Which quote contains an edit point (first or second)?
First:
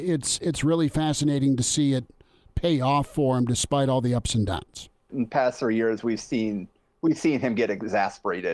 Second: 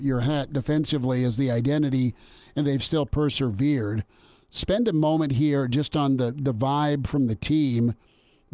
first